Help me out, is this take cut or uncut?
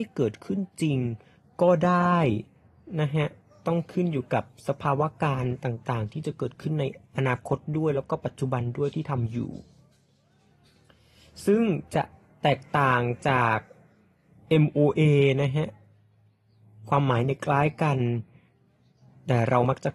uncut